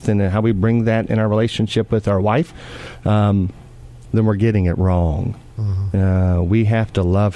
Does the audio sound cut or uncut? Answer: cut